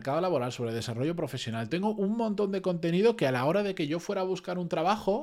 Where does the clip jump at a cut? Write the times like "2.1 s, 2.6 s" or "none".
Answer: 1.7 s